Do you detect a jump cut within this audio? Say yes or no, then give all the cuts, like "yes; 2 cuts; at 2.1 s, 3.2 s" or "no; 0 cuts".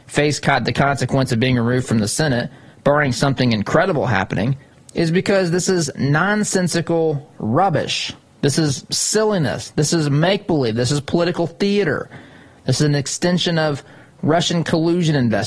no; 0 cuts